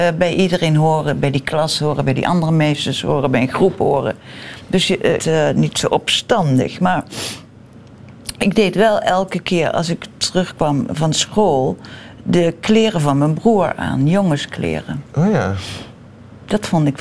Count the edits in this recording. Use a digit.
1